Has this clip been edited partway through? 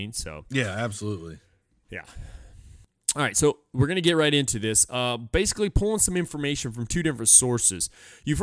no; 0 cuts

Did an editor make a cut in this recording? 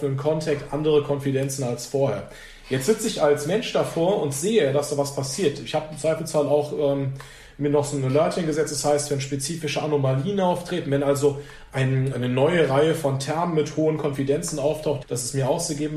yes; 2 cuts; at 12.1 s, 15.0 s

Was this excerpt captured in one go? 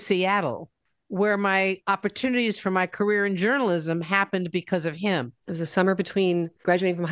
no; 1 cut; at 5.4 s

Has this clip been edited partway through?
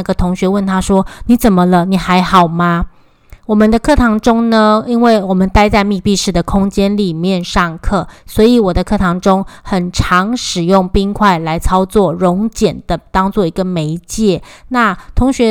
no; 0 cuts

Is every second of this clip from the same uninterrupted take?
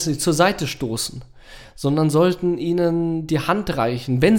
yes; 0 cuts

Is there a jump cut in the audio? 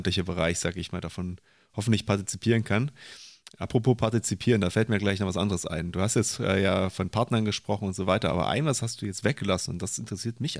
no; 0 cuts

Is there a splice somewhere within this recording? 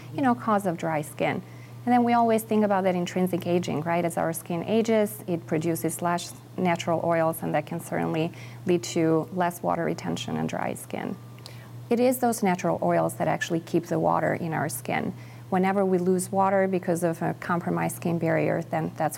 yes; 1 cut; at 11.9 s

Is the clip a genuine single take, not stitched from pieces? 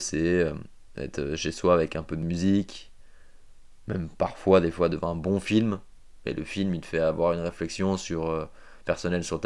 yes; 0 cuts

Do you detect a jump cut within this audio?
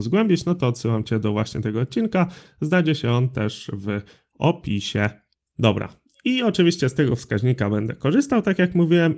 no; 0 cuts

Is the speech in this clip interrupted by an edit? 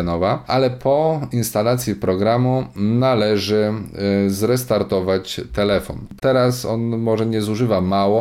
yes; 1 cut; at 6.2 s

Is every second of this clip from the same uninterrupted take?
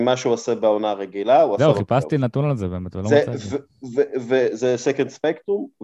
yes; 0 cuts

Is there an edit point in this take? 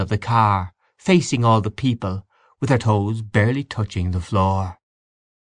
no; 0 cuts

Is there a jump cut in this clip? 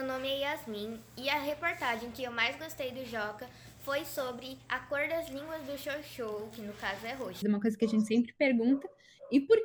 yes; 1 cut; at 7.4 s

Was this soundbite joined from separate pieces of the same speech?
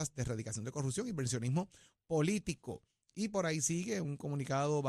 no; 0 cuts

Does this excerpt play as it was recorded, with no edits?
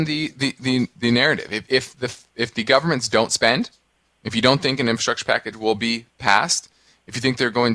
yes; 0 cuts

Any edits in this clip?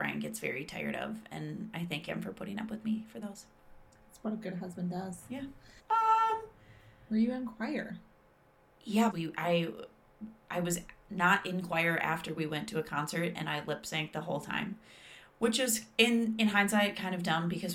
yes; 2 cuts; at 5.8 s, 9.1 s

